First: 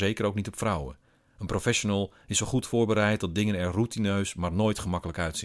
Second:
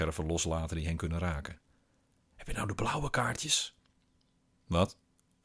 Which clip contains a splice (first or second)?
second